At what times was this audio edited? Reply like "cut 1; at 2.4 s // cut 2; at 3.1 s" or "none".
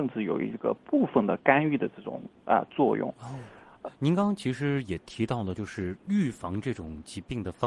cut 1; at 3.8 s